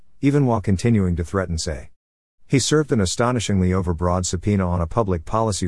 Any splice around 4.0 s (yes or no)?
no